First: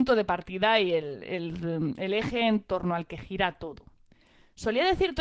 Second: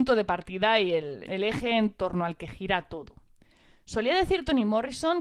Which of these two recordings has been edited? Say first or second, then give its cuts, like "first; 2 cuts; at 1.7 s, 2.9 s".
second; 1 cut; at 1.3 s